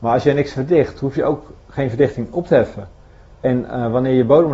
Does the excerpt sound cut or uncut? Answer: uncut